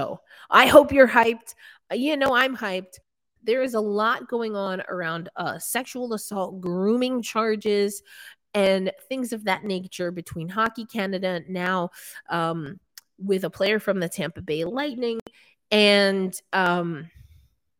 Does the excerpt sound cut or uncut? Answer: cut